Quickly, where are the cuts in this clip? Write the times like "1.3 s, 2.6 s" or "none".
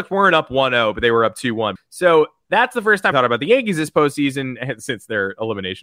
1.8 s, 3.1 s